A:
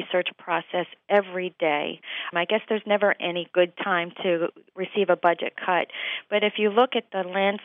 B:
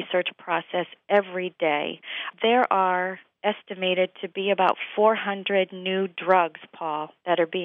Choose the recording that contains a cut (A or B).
A